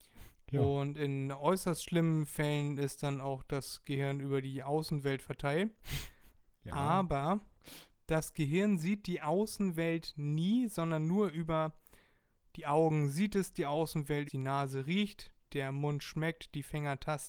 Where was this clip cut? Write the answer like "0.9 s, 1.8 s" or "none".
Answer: 14.3 s